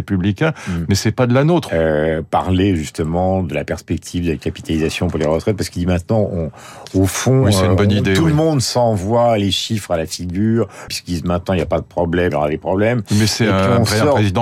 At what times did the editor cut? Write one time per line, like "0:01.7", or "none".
0:01.7
0:10.9
0:12.3